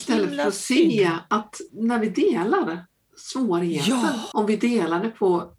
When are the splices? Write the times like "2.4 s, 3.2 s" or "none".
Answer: 1.7 s, 4.3 s